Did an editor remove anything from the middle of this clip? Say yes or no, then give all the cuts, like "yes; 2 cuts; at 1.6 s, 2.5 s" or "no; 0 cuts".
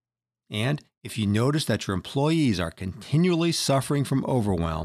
no; 0 cuts